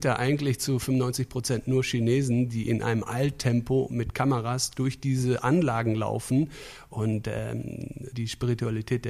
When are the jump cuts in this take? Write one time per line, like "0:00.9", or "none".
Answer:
0:08.1